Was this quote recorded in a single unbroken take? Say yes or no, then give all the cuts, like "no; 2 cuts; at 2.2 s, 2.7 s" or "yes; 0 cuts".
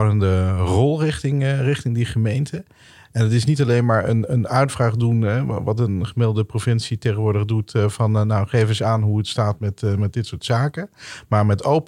yes; 0 cuts